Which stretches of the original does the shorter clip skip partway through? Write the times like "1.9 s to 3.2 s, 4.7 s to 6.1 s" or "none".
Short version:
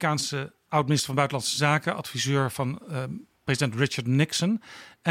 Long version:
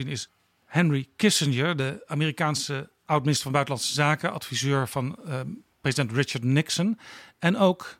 none